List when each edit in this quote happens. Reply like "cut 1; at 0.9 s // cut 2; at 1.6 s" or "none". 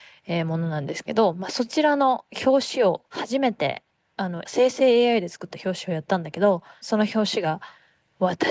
cut 1; at 3.1 s // cut 2; at 4.4 s // cut 3; at 6.8 s